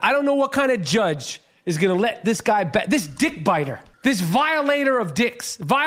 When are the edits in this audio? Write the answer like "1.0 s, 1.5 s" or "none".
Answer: 3.9 s